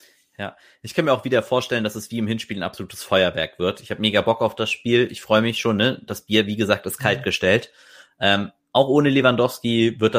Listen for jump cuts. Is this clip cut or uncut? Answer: uncut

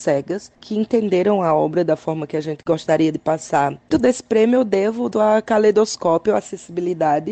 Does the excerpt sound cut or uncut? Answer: cut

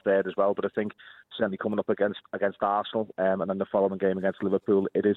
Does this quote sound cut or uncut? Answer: uncut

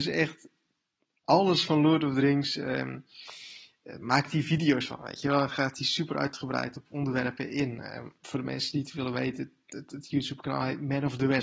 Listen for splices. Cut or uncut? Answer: uncut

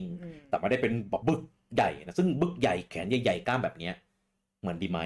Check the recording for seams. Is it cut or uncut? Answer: cut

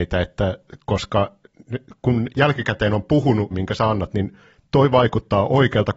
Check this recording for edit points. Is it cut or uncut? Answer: cut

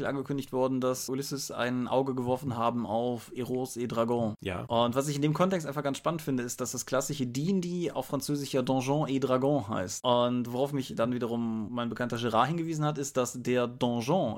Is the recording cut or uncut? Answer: uncut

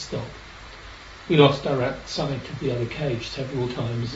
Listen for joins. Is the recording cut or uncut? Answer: uncut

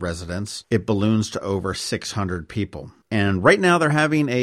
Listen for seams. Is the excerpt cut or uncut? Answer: cut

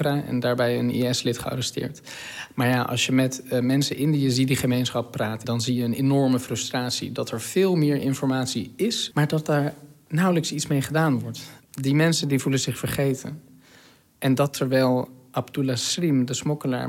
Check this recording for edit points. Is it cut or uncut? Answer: cut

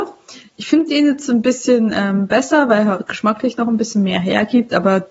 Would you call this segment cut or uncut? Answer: uncut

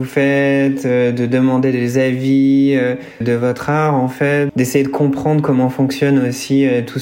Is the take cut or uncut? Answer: cut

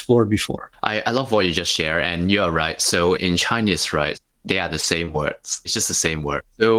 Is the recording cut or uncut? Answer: cut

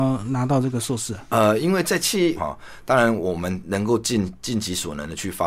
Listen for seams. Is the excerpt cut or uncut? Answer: cut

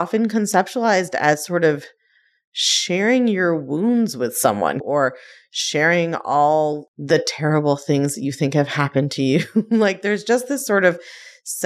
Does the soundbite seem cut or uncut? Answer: cut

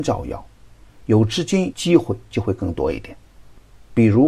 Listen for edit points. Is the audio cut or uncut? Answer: cut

